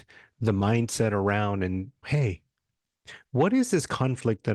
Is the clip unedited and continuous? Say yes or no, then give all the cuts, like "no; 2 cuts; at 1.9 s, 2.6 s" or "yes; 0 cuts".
no; 1 cut; at 2.0 s